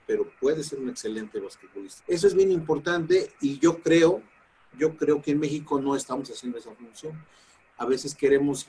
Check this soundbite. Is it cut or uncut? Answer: cut